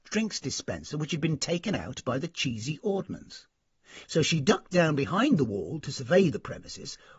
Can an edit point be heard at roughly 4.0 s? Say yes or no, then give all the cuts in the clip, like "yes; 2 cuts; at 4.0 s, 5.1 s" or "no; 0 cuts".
yes; 1 cut; at 4.0 s